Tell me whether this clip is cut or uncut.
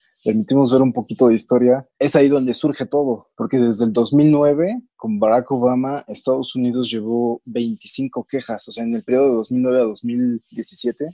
cut